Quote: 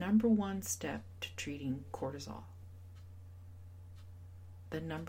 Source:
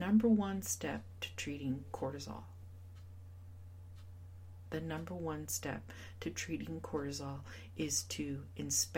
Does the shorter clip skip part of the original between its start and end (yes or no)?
no